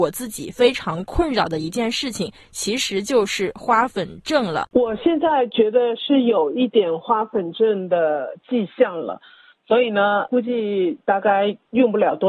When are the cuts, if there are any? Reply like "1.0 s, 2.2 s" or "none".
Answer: 4.7 s